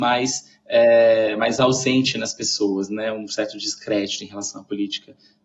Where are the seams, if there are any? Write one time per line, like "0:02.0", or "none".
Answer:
none